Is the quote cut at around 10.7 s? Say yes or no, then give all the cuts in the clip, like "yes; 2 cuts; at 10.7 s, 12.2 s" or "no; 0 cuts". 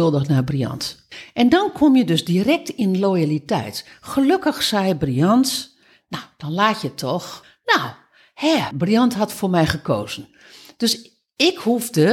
no; 1 cut; at 8.7 s